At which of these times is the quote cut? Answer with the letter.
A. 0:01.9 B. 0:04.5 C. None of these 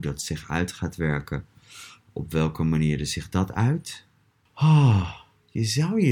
B